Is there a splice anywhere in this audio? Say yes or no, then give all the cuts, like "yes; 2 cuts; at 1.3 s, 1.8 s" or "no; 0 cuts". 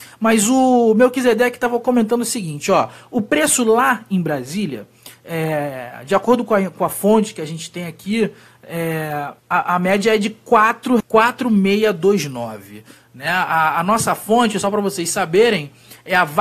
yes; 2 cuts; at 9.4 s, 11.0 s